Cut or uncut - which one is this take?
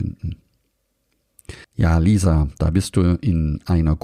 cut